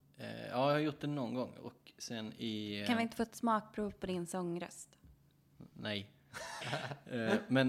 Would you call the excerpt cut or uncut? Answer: cut